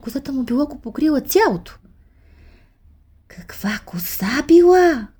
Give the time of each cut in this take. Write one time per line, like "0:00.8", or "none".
none